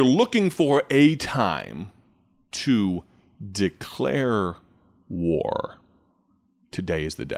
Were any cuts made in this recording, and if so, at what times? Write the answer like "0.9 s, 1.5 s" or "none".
none